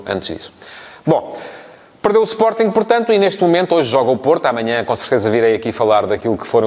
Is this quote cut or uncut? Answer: uncut